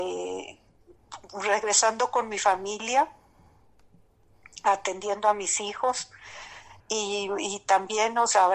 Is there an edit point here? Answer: yes; 1 cut; at 6.8 s

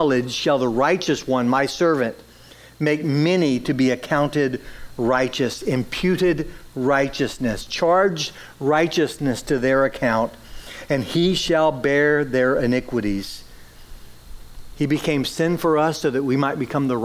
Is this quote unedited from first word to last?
yes; 0 cuts

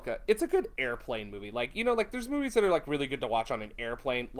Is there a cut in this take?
no; 0 cuts

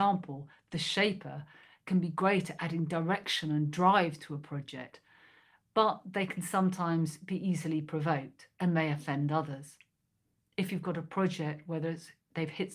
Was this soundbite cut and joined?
yes; 1 cut; at 10.5 s

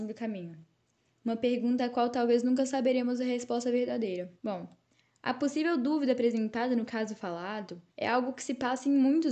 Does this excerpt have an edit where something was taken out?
yes; 2 cuts; at 4.4 s, 7.9 s

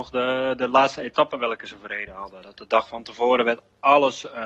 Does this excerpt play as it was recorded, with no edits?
yes; 0 cuts

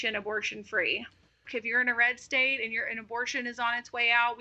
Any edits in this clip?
yes; 1 cut; at 1.5 s

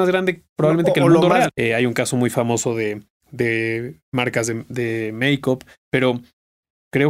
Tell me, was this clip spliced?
yes; 1 cut; at 1.5 s

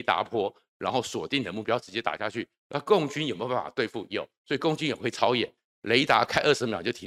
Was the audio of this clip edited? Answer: no; 0 cuts

